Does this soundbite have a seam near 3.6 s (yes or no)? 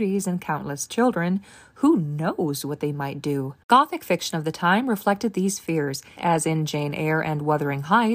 yes